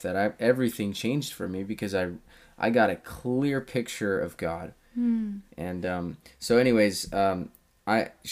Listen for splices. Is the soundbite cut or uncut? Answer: cut